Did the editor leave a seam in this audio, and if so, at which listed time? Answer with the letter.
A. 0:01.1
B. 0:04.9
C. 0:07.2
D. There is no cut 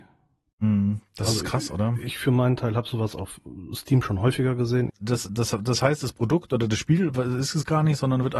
B